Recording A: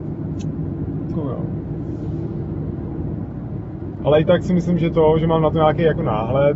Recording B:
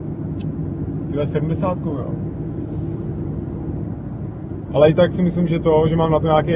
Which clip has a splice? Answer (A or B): A